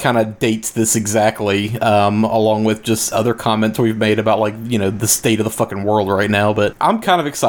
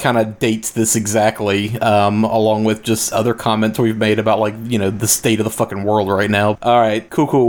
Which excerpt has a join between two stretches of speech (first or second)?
second